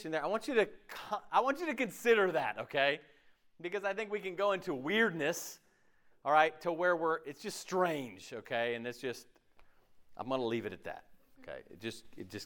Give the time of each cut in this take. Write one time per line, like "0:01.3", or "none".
none